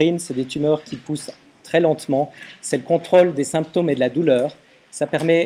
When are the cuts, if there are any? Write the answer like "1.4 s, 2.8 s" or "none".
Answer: none